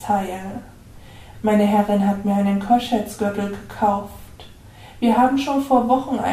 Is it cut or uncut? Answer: cut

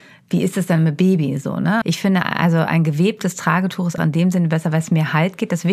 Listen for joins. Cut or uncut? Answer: cut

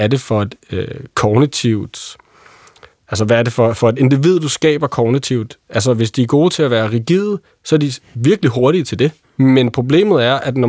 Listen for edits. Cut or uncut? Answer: cut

